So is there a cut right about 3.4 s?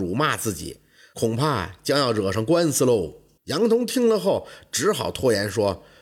yes; 1 cut; at 3.4 s

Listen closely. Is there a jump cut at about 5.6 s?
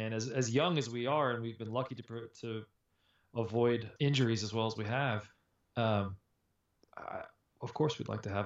no; 1 cut; at 4.0 s

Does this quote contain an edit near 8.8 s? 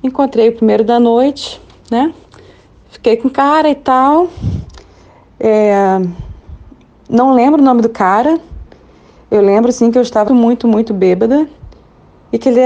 no; 1 cut; at 10.3 s

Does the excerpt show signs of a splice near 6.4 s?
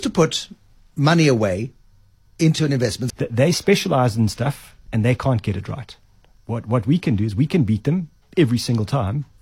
no; 2 cuts; at 3.1 s, 4.9 s

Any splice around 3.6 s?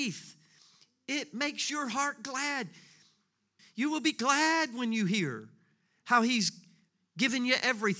yes; 1 cut; at 3.6 s

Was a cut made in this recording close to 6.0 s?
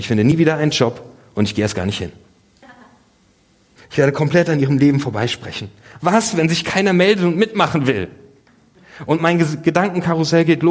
no; 1 cut; at 3.8 s

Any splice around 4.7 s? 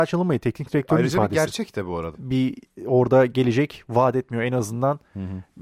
no; 1 cut; at 2.1 s

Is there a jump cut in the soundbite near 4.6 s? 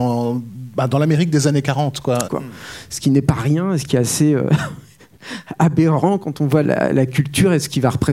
no; 2 cuts; at 2.2 s, 6.6 s

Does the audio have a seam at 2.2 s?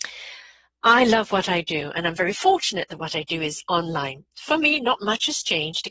no; 0 cuts

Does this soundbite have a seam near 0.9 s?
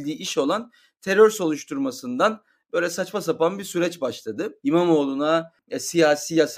no; 1 cut; at 4.6 s

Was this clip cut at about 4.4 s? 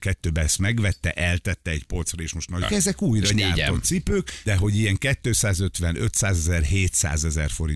yes; 2 cuts; at 2.6 s, 4.4 s

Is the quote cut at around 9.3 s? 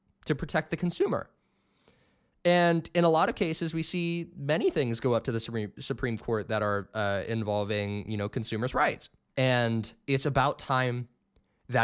yes; 1 cut; at 9.3 s

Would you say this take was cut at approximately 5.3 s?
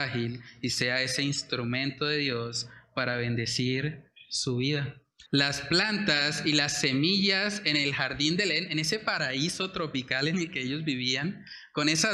yes; 1 cut; at 5.3 s

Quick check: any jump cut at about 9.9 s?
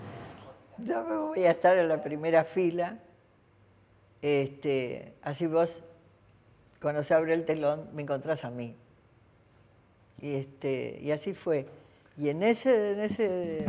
no; 0 cuts

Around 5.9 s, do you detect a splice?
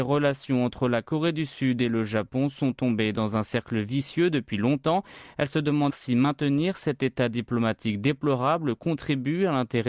yes; 1 cut; at 5.9 s

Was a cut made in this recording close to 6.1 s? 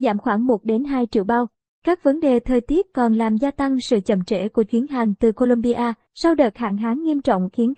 yes; 1 cut; at 6.1 s

